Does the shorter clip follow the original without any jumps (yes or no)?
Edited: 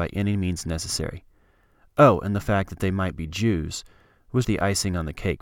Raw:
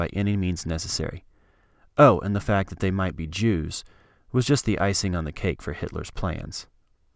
no